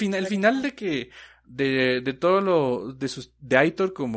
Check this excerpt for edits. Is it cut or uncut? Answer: uncut